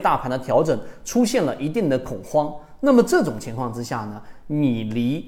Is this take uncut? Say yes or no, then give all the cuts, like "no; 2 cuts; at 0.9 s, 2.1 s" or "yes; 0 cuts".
yes; 0 cuts